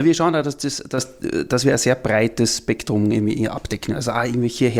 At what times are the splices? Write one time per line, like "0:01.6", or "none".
none

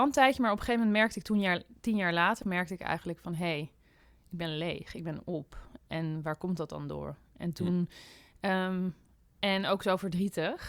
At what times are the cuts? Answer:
0:02.4
0:08.3

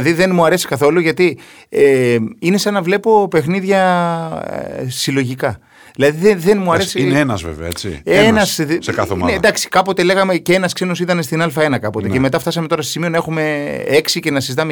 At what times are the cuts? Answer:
none

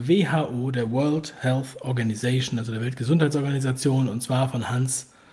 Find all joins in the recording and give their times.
none

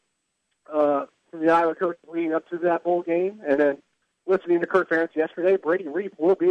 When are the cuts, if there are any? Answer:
none

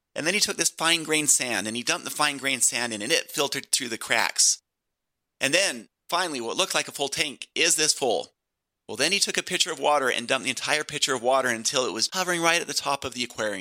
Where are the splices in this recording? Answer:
0:08.7
0:12.1

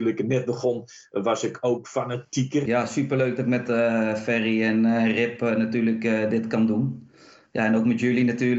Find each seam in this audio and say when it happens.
0:02.7

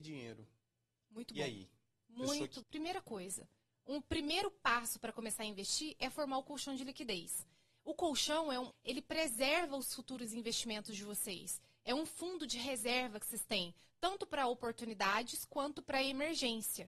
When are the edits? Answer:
0:02.6
0:08.7

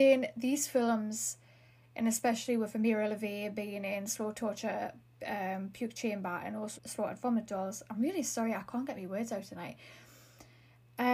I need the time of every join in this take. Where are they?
0:06.8

